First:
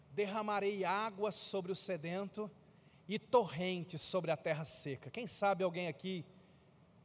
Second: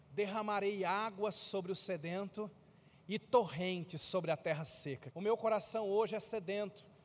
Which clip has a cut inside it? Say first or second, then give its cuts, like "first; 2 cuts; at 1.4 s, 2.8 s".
second; 1 cut; at 5.1 s